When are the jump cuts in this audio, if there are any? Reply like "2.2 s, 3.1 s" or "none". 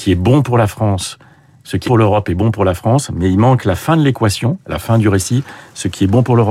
1.9 s